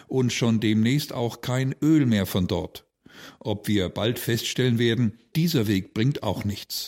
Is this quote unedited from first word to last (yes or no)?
no